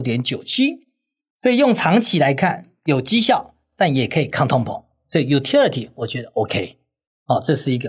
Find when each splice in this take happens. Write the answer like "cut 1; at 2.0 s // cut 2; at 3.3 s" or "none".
none

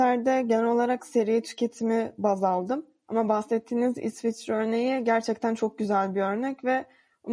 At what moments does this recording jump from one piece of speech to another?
none

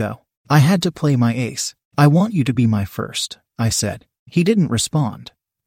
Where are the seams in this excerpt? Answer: none

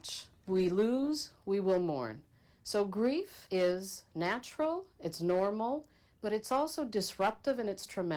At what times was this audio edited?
none

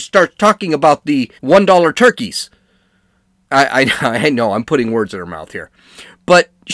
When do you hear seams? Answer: cut 1; at 1.4 s

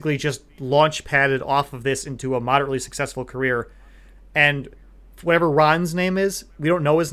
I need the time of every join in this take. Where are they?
none

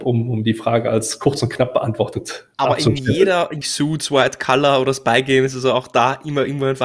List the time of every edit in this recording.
cut 1; at 2.5 s // cut 2; at 3.6 s

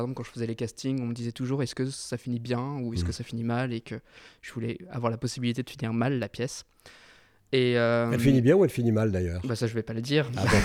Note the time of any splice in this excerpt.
none

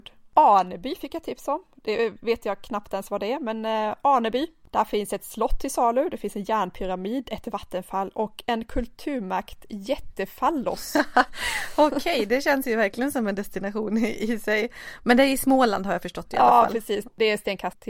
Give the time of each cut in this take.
none

